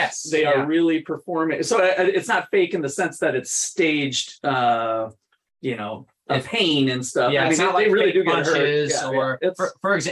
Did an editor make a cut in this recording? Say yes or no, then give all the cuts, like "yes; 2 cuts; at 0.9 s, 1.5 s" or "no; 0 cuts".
no; 0 cuts